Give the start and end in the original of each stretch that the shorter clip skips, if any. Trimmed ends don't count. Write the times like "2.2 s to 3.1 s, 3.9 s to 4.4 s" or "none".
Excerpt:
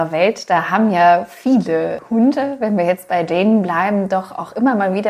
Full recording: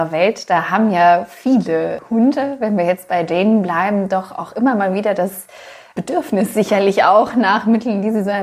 none